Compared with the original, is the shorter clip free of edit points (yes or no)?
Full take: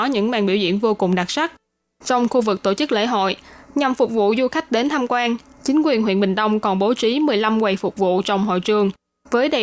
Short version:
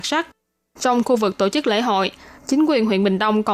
no